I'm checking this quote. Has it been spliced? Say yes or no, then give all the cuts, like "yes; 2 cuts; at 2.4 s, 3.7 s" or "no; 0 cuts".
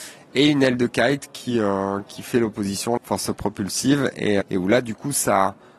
yes; 2 cuts; at 3.0 s, 4.4 s